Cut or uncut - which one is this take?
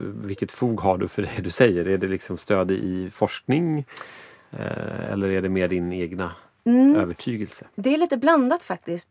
uncut